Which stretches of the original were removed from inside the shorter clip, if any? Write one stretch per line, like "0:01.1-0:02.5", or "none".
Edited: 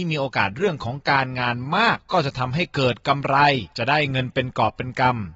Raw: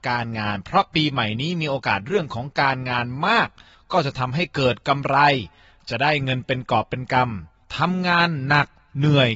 0:03.5-0:03.8
0:05.5-0:05.8

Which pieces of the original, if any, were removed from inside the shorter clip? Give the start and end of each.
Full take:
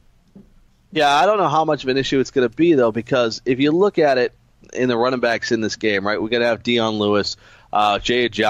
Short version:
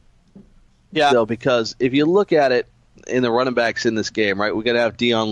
0:01.1-0:02.8

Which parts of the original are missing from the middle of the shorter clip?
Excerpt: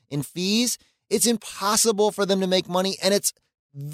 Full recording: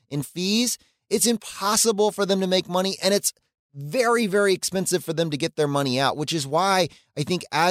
none

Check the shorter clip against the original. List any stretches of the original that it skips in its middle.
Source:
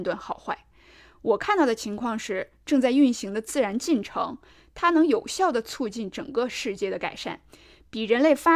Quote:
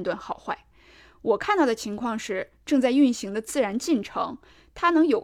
none

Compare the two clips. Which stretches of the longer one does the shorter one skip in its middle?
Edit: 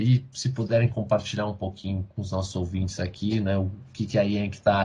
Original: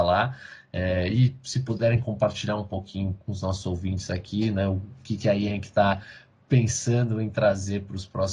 none

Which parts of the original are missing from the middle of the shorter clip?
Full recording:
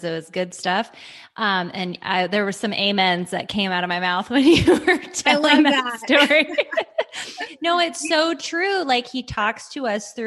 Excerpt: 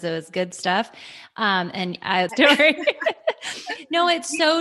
0:02.3-0:06.0

